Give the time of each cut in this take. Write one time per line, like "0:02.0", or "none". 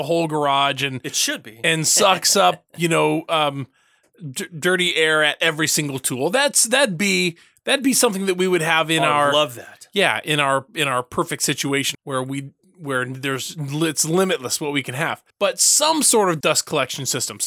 0:11.9
0:15.3
0:16.4

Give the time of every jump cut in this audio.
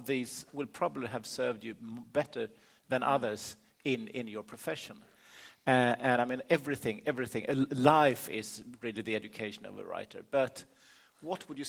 none

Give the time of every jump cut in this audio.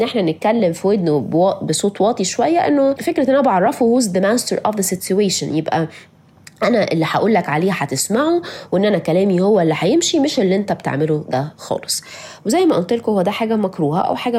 0:03.0

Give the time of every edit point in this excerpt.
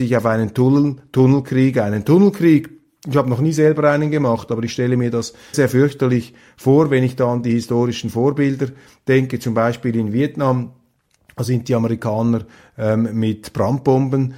0:05.5

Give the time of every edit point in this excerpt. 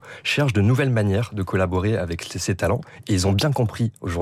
none

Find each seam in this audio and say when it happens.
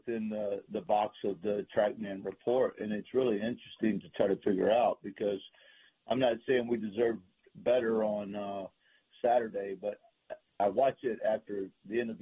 0:10.5

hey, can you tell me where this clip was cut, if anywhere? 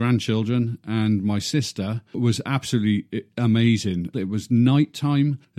0:04.1

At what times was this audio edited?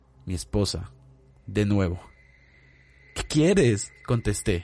none

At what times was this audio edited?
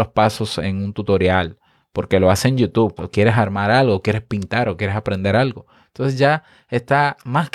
0:03.0

